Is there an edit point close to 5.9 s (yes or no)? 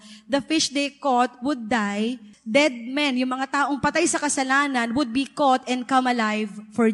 no